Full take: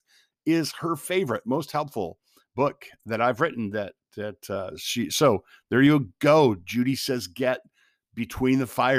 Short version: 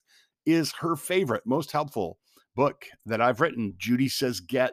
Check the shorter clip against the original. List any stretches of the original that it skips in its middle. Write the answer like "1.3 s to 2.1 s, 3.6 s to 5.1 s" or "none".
3.7 s to 6.6 s